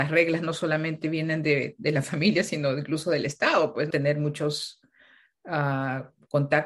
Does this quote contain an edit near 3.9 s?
yes; 1 cut; at 3.9 s

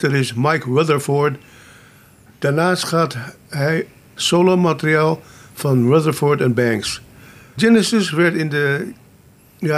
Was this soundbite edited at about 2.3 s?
no; 2 cuts; at 4.2 s, 7.6 s

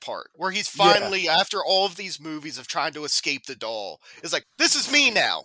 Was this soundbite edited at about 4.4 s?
yes; 1 cut; at 4.4 s

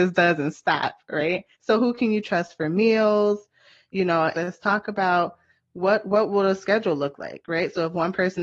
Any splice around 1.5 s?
yes; 2 cuts; at 1.5 s, 4.3 s

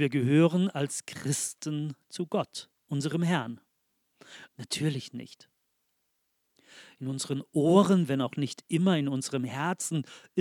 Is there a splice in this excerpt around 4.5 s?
yes; 1 cut; at 4.5 s

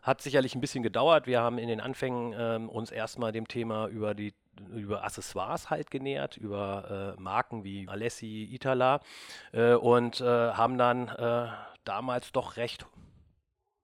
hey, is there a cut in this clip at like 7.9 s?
yes; 1 cut; at 7.9 s

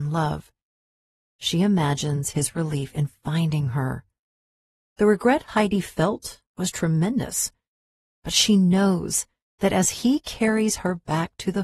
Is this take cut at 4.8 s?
yes; 1 cut; at 4.8 s

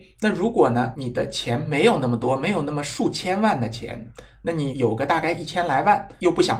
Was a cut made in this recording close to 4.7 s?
yes; 1 cut; at 4.7 s

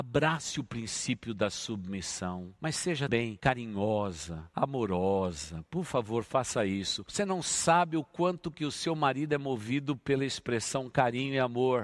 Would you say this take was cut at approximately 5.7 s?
no; 1 cut; at 3.1 s

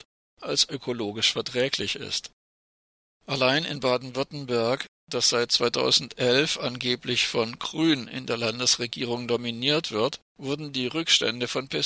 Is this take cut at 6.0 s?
no; 2 cuts; at 3.0 s, 10.3 s

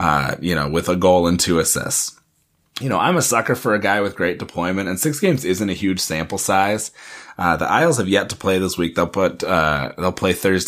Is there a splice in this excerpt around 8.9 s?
no; 0 cuts

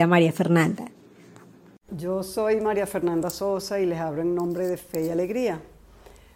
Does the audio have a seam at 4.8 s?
no; 1 cut; at 1.9 s

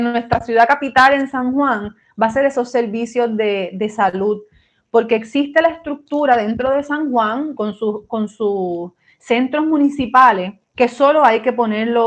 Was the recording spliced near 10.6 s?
yes; 1 cut; at 10.6 s

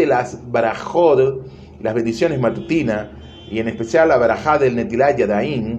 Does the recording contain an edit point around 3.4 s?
no; 0 cuts

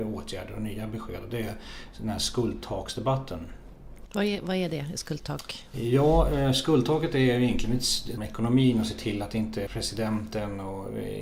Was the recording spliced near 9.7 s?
yes; 2 cuts; at 8.2 s, 9.7 s

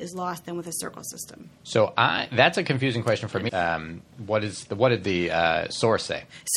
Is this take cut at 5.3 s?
no; 2 cuts; at 1.6 s, 3.5 s

